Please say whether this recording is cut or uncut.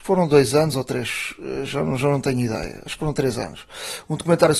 uncut